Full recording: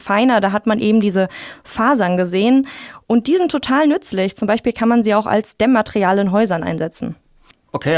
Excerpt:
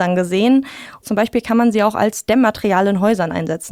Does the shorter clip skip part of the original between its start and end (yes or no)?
yes